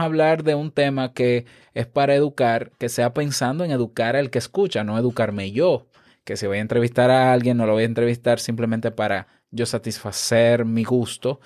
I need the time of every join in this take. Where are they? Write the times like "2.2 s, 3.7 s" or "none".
none